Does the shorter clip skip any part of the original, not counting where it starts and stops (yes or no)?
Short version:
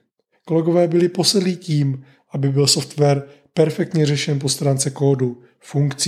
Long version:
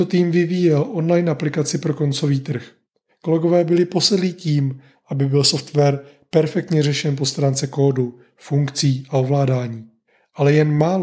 no